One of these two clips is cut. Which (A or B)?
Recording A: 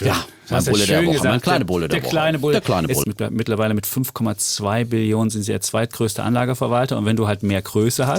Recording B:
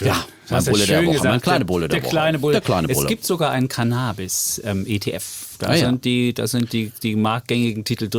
A